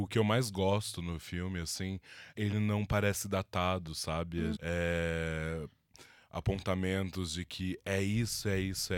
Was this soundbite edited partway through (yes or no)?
yes